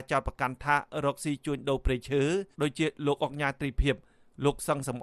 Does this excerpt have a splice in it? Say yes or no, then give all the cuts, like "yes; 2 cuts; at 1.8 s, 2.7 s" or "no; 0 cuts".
yes; 1 cut; at 2.5 s